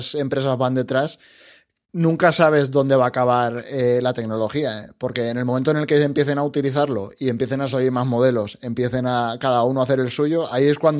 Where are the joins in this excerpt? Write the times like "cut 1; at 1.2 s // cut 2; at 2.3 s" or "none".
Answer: none